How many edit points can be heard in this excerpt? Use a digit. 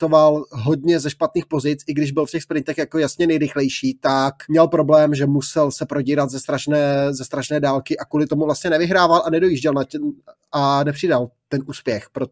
1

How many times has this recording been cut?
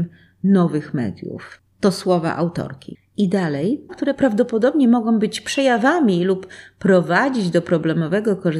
1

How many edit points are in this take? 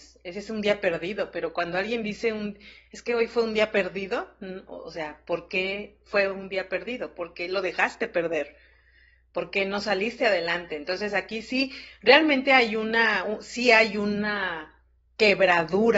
0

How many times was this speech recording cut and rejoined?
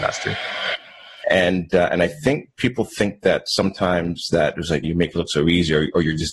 2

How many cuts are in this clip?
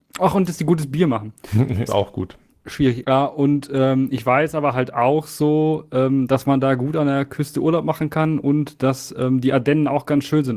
2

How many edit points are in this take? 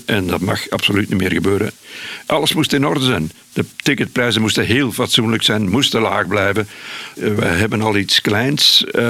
2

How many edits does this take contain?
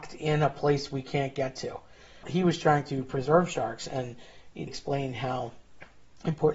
2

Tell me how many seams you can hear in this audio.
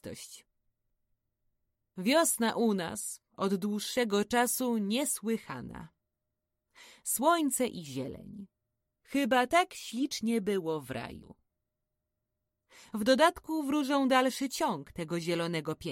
0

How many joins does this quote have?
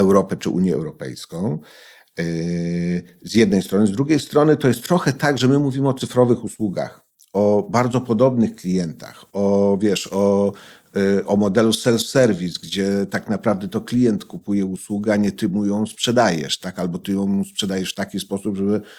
0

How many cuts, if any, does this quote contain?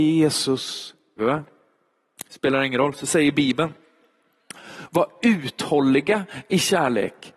1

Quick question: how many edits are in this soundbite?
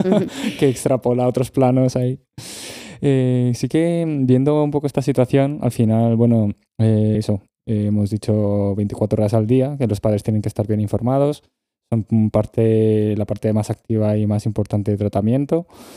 1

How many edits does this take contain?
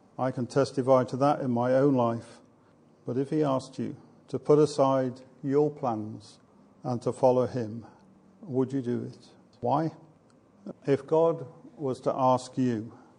2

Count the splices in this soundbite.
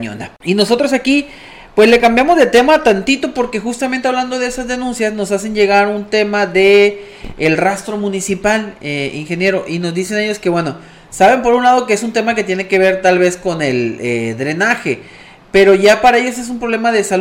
0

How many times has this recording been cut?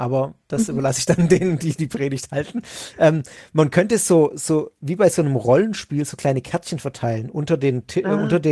0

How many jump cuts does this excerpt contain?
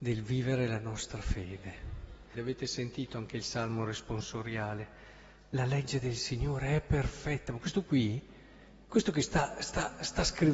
1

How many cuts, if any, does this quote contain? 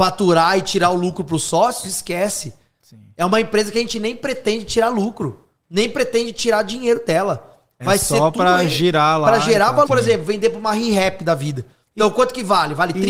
2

